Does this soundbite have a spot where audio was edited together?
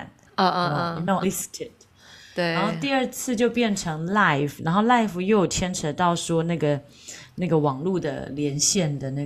yes; 1 cut; at 1.2 s

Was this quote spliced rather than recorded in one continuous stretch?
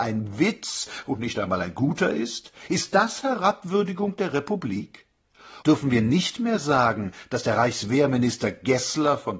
yes; 1 cut; at 5.6 s

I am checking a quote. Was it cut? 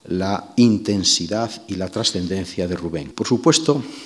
yes; 1 cut; at 3.1 s

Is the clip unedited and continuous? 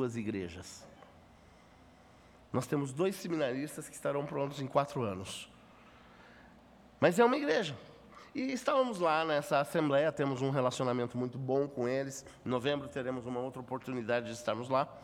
yes; 0 cuts

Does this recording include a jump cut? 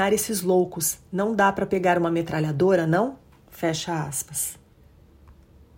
no; 0 cuts

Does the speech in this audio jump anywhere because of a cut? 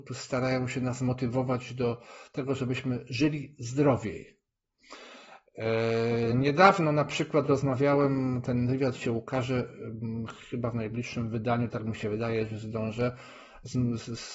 no; 0 cuts

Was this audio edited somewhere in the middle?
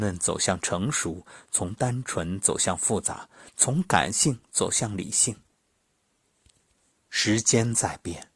no; 0 cuts

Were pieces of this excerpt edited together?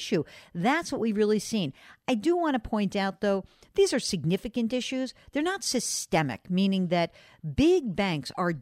no; 0 cuts

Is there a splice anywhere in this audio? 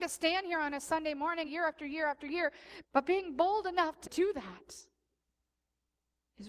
yes; 3 cuts; at 1.5 s, 2.8 s, 4.0 s

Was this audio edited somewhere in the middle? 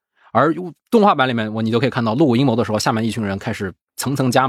no; 0 cuts

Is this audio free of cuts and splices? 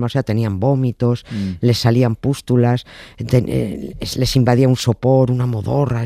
yes; 0 cuts

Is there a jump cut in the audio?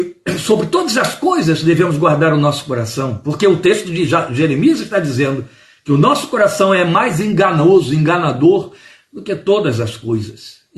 no; 0 cuts

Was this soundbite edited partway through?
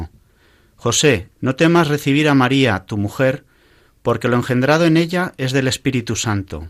yes; 1 cut; at 1.3 s

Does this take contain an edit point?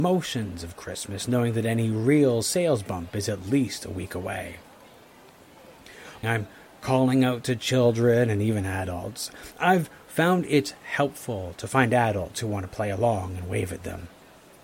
yes; 1 cut; at 6.2 s

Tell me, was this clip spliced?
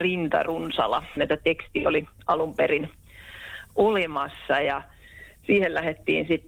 yes; 1 cut; at 1.2 s

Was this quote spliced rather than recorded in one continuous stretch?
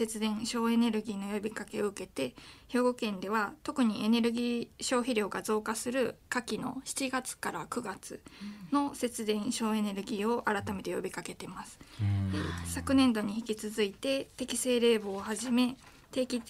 no; 0 cuts

